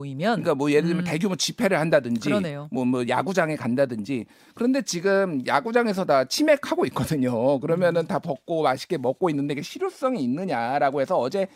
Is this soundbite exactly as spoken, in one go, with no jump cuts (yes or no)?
yes